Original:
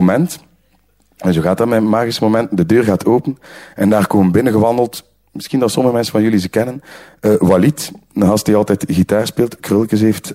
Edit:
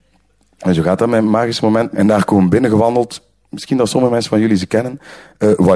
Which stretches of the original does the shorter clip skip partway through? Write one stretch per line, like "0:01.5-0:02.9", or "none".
0:02.5-0:03.7